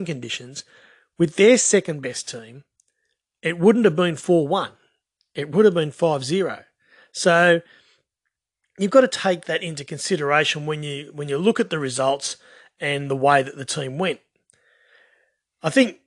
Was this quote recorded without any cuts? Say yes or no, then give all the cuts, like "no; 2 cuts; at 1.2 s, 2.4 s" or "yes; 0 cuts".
yes; 0 cuts